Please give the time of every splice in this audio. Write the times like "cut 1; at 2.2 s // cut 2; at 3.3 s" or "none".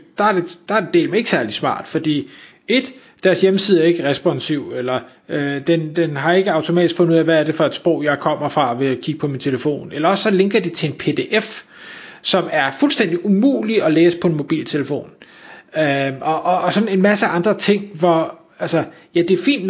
none